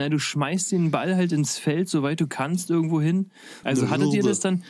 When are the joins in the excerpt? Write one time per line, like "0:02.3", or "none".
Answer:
0:03.6